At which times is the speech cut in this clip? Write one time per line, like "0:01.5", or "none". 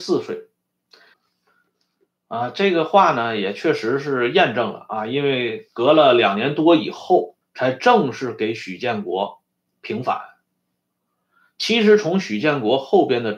0:01.1
0:07.4